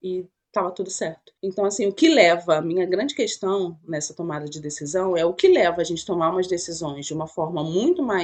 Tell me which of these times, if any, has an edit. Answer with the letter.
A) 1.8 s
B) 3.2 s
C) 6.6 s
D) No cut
D